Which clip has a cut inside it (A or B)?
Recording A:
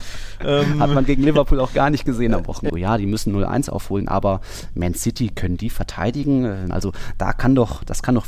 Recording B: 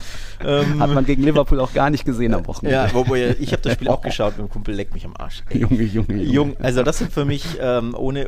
A